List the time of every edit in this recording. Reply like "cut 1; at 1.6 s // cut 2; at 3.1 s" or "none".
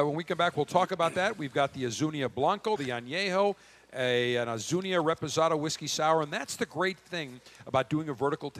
cut 1; at 2.8 s